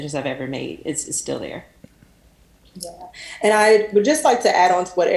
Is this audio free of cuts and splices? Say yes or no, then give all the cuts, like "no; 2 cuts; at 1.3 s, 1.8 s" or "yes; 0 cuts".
yes; 0 cuts